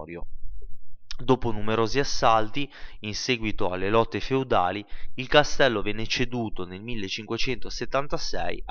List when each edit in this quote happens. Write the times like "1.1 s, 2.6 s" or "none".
none